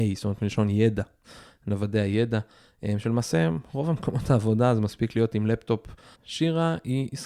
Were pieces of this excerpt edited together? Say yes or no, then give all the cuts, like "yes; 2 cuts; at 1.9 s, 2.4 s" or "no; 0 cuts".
yes; 1 cut; at 6.1 s